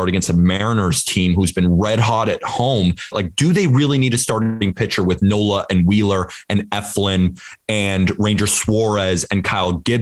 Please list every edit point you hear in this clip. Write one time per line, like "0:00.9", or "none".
0:03.1